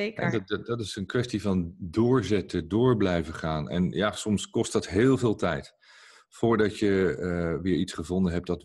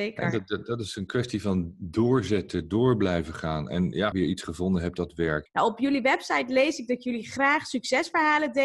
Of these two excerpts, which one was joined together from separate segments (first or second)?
second